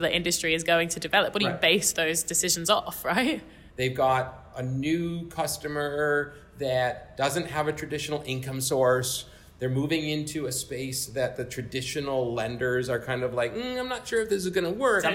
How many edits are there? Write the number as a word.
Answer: one